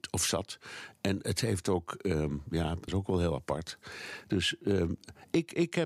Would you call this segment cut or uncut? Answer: cut